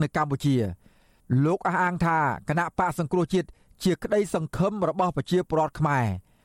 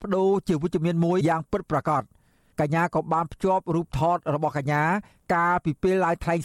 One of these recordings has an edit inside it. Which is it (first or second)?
second